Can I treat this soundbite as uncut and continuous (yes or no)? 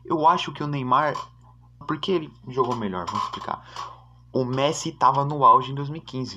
no